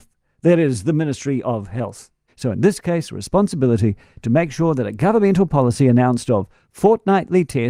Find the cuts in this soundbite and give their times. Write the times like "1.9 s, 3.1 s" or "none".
2.3 s